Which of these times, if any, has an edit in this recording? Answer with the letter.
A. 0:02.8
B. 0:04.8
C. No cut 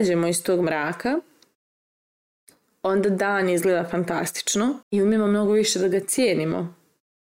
B